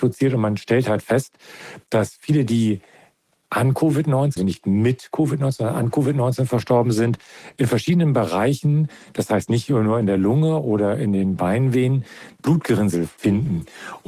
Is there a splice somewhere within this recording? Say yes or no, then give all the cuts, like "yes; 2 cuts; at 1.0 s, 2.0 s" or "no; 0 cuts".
yes; 1 cut; at 4.4 s